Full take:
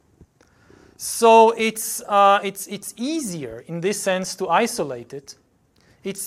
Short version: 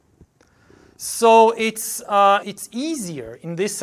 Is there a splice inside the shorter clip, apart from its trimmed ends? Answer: yes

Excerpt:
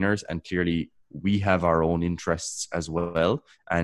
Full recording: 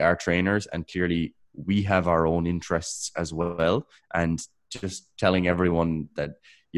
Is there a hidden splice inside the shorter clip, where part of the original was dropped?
no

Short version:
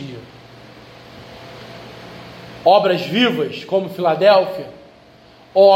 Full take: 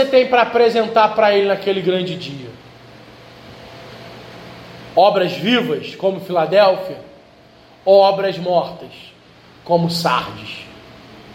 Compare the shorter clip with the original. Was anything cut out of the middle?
no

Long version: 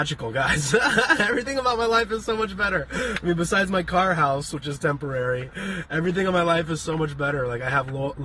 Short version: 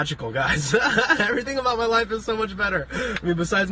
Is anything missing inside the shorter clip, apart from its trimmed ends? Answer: no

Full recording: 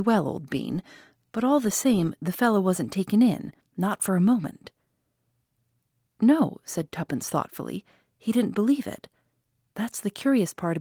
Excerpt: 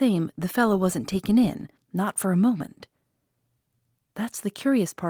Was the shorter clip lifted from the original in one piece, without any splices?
no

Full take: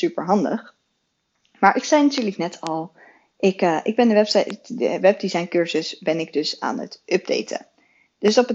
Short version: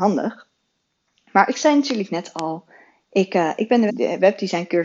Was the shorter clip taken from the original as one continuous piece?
no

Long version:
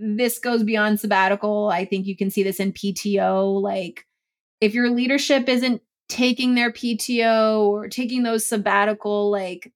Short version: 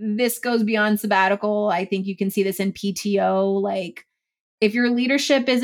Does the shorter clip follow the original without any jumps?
yes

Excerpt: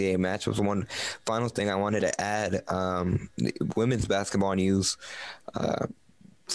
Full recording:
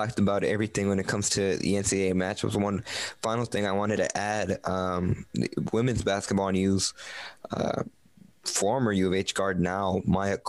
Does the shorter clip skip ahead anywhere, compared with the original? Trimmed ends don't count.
no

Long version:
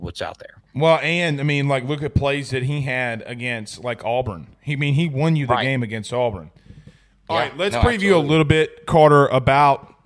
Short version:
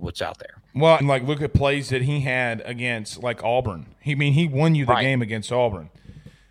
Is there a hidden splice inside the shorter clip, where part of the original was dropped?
yes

